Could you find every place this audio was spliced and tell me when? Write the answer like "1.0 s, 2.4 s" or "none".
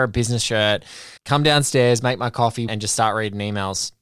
1.2 s, 2.7 s